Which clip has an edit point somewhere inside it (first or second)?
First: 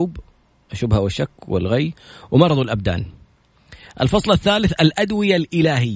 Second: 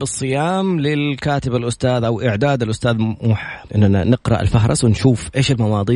second